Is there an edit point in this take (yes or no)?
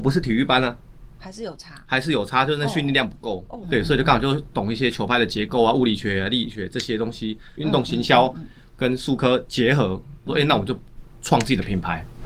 yes